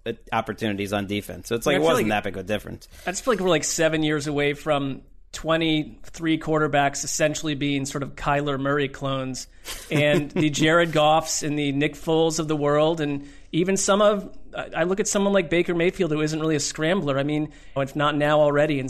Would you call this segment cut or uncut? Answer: cut